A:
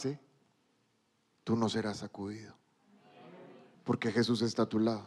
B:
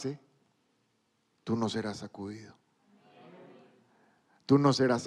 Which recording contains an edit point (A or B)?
A